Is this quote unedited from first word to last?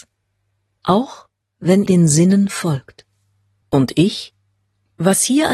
no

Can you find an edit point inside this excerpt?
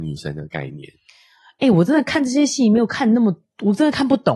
no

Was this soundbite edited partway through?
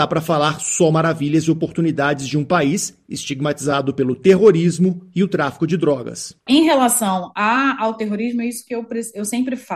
no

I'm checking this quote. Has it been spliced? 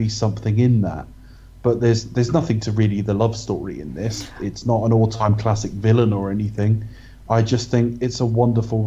no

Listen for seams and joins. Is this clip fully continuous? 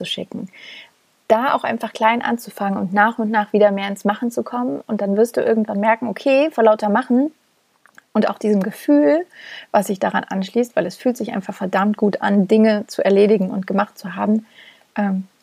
yes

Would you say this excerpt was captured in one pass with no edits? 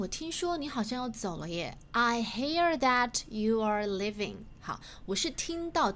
yes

